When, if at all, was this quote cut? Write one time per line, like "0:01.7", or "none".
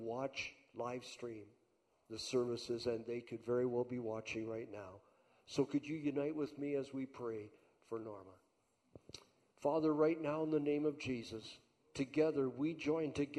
none